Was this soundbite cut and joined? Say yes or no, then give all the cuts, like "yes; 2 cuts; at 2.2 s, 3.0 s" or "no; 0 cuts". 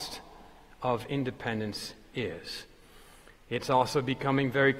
no; 0 cuts